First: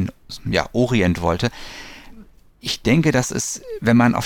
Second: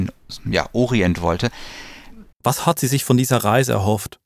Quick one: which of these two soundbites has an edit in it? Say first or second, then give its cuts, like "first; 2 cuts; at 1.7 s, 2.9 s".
second; 1 cut; at 2.3 s